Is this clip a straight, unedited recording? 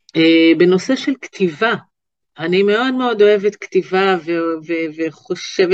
yes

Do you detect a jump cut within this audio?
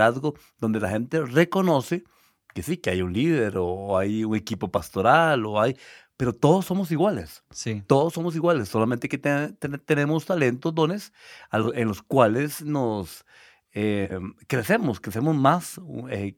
no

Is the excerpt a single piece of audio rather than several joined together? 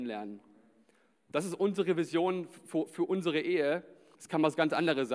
no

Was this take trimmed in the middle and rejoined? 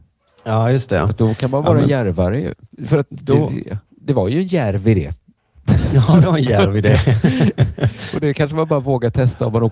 no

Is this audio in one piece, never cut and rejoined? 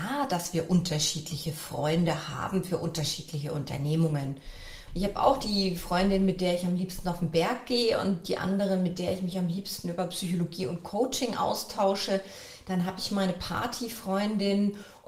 no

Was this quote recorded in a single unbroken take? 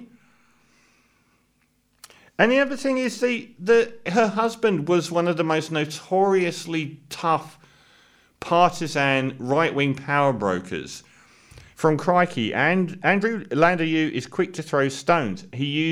no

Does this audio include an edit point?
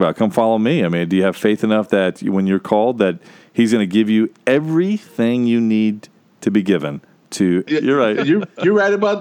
yes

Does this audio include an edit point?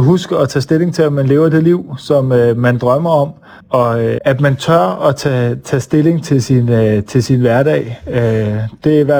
yes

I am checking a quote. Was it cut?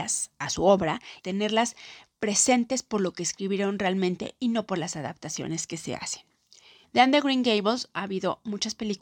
yes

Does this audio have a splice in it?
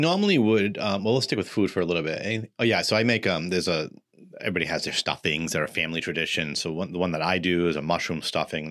no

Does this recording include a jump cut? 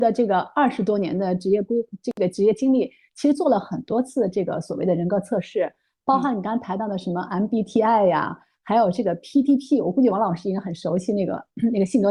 no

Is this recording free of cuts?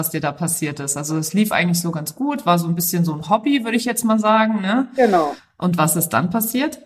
yes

